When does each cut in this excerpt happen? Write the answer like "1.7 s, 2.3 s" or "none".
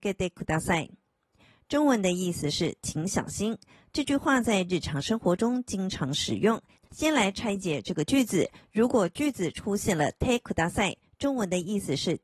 none